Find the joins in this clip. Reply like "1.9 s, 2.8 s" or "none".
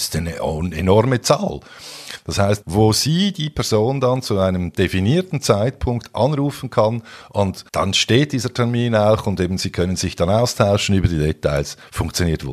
2.6 s, 7.7 s